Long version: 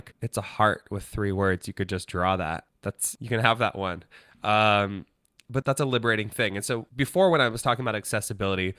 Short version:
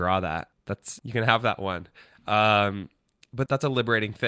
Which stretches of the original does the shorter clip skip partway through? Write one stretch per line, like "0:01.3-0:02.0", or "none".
none